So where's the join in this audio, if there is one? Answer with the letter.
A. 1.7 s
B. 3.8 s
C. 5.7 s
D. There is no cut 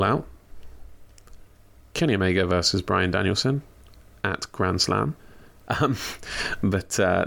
C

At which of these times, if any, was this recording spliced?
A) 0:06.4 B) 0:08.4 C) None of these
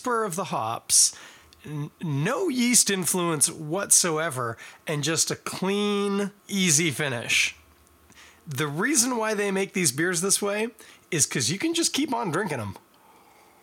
A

